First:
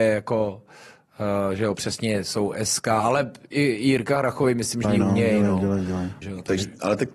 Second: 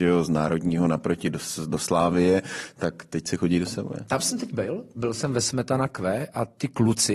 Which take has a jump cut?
first; 2 cuts; at 4.8 s, 6.2 s

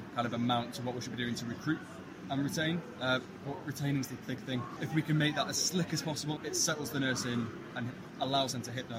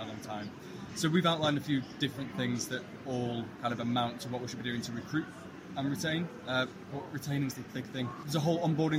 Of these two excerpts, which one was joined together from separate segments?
first; 2 cuts; at 4.8 s, 6.4 s

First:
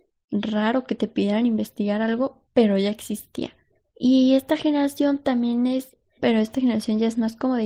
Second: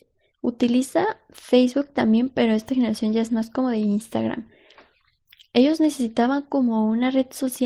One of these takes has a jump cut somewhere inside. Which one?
first; 2 cuts; at 3.9 s, 6.2 s

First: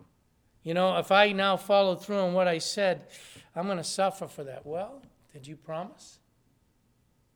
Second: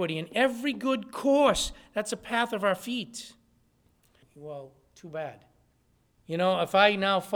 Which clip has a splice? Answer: second; 2 cuts; at 4.2 s, 6.2 s

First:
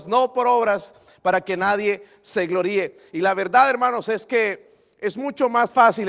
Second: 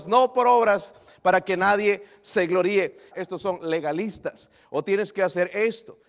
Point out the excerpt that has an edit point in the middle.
second; 1 cut; at 3.1 s

